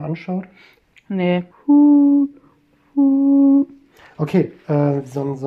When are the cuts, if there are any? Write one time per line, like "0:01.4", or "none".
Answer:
0:01.5